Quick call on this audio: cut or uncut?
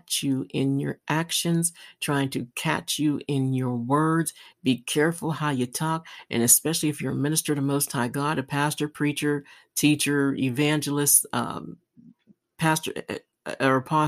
uncut